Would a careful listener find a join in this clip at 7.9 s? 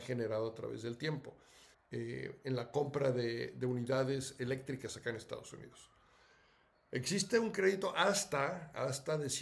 no; 1 cut; at 1.7 s

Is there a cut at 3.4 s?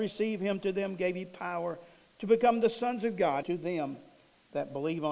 yes; 1 cut; at 3.4 s

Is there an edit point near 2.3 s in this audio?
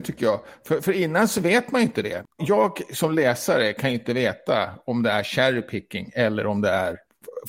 no; 0 cuts

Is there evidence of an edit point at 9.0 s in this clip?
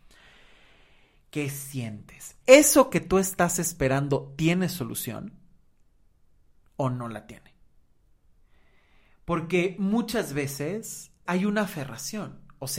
no; 2 cuts; at 2.4 s, 11.2 s

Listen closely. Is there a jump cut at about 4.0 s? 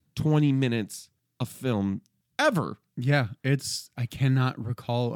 yes; 1 cut; at 4.0 s

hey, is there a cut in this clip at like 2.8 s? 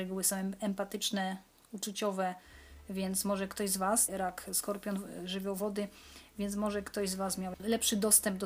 no; 1 cut; at 4.1 s

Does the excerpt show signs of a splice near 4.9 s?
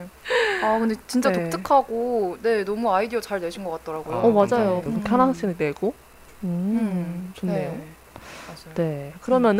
yes; 1 cut; at 4.9 s

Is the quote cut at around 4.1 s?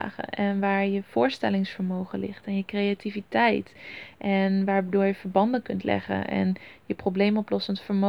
no; 0 cuts

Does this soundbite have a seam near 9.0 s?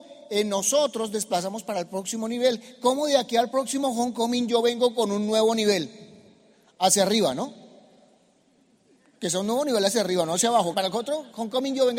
no; 1 cut; at 10.7 s

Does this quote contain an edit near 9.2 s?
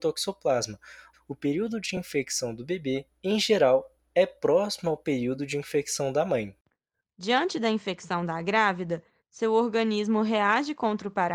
no; 2 cuts; at 1.1 s, 7.0 s

